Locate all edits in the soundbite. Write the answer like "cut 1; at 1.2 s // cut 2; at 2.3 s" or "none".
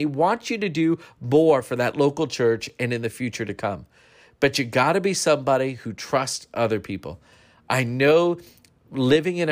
none

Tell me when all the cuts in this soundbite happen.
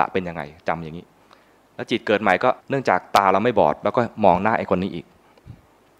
cut 1; at 2.6 s

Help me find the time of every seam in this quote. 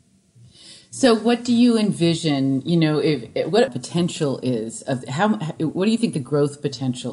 cut 1; at 3.7 s

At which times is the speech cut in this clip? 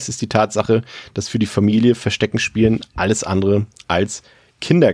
none

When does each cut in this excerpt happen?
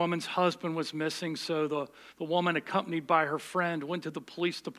none

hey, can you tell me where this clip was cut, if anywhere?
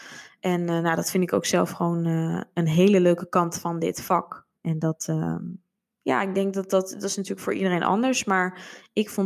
cut 1; at 4.6 s

